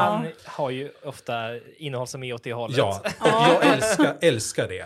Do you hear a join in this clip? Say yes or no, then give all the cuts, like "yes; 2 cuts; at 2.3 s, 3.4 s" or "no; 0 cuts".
no; 0 cuts